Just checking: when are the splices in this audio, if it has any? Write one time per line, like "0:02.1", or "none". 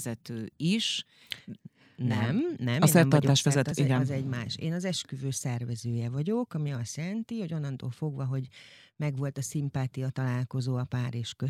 0:03.7